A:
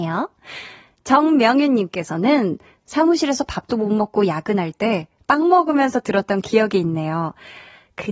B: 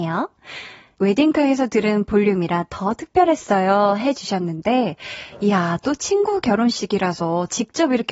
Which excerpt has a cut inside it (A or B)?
B